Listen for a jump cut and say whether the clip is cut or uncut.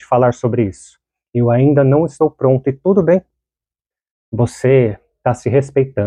uncut